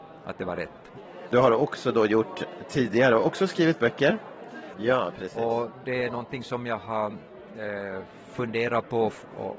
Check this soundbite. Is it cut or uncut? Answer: cut